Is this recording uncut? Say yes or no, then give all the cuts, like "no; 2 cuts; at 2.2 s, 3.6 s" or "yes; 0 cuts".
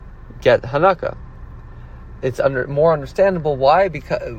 no; 1 cut; at 2.2 s